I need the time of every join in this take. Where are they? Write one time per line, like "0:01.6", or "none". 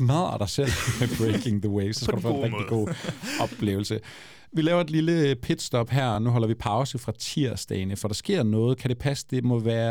none